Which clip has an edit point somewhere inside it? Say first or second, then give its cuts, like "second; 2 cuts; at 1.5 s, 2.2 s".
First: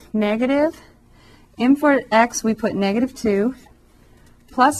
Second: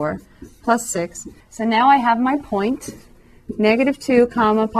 second; 1 cut; at 1.4 s